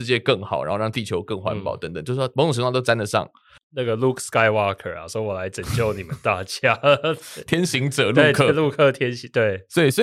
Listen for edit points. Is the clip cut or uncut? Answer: cut